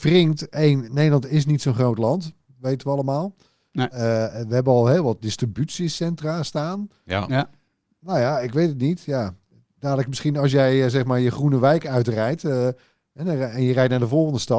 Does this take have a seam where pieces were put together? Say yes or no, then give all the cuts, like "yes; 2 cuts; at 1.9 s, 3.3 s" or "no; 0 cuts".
yes; 1 cut; at 7.3 s